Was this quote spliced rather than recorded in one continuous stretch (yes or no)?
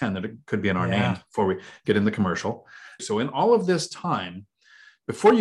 yes